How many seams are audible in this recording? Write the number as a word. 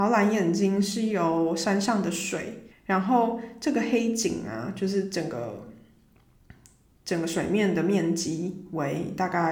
one